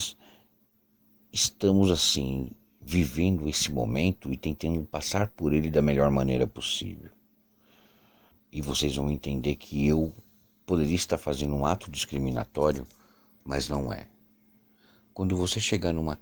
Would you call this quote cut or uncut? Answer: cut